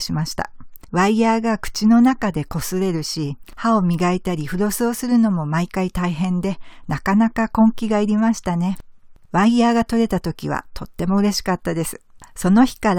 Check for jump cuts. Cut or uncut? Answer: cut